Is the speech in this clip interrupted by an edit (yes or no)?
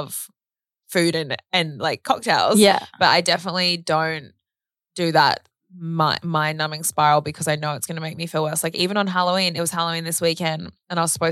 no